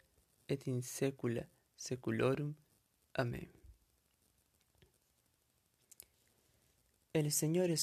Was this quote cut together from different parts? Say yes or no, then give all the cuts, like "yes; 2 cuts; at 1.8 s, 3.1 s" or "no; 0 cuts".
no; 0 cuts